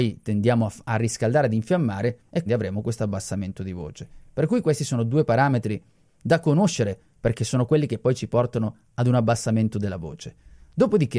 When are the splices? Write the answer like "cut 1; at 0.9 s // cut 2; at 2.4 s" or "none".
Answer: cut 1; at 2.5 s